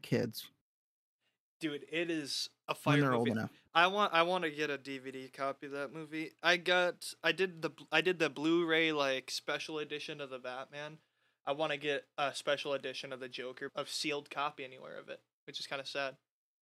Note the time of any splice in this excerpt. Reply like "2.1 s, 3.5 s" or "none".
13.7 s